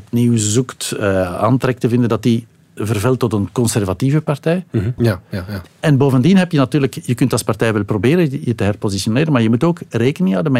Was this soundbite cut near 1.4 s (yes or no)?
no